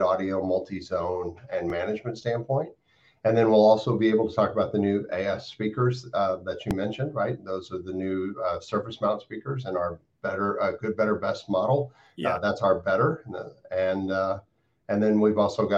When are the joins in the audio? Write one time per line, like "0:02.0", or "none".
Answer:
none